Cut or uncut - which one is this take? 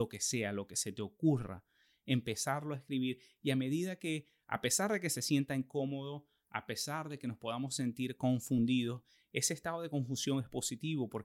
uncut